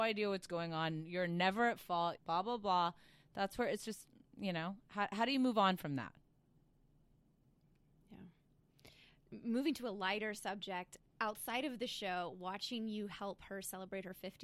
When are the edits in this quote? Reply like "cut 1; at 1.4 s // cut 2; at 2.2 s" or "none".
cut 1; at 2.2 s // cut 2; at 11.0 s